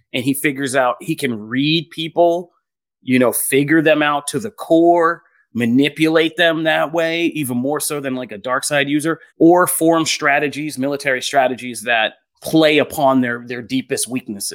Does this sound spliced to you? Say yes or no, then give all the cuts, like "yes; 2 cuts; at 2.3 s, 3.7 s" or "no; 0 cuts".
yes; 2 cuts; at 9.3 s, 12.3 s